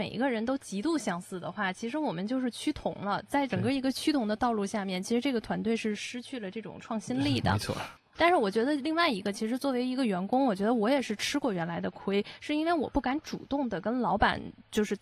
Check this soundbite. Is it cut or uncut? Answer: uncut